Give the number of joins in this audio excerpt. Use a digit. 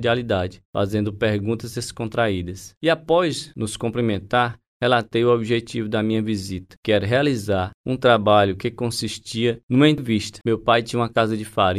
1